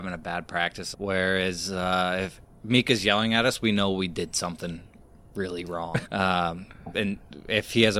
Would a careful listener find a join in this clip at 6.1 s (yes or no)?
yes